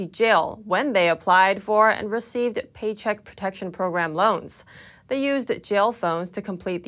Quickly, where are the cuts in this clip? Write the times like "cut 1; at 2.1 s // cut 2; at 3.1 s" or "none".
cut 1; at 4.9 s

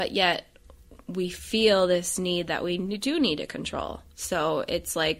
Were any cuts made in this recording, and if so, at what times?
none

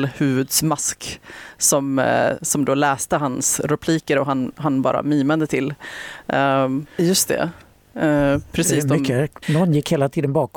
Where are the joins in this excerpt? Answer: cut 1; at 6.9 s // cut 2; at 9.4 s

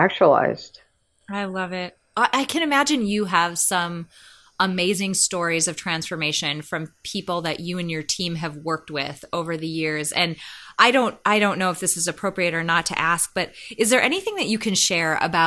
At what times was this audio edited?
none

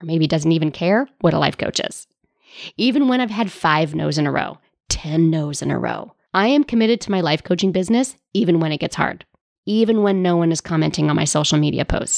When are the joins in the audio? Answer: cut 1; at 6.3 s // cut 2; at 9.6 s

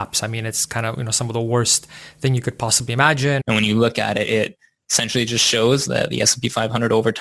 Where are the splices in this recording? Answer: cut 1; at 3.4 s

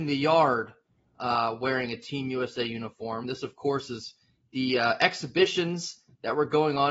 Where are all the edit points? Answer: none

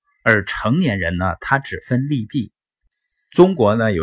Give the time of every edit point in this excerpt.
cut 1; at 3.1 s

